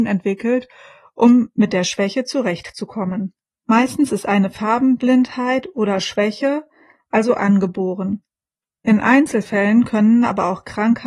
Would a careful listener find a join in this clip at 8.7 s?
no; 1 cut; at 3.5 s

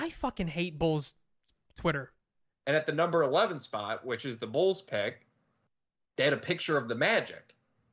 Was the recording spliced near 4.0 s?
no; 1 cut; at 2.5 s

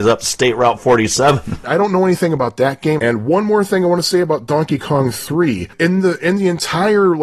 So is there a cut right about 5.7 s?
no; 2 cuts; at 1.6 s, 3.0 s

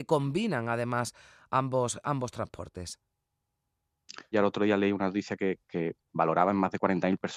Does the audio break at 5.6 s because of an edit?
yes; 2 cuts; at 4.3 s, 5.6 s

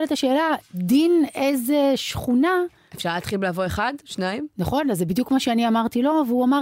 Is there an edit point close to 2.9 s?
yes; 1 cut; at 2.9 s

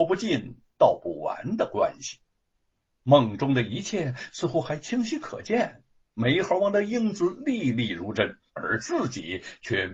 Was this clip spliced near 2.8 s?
yes; 2 cuts; at 2.8 s, 8.5 s

